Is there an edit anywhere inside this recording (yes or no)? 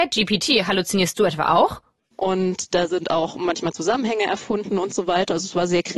yes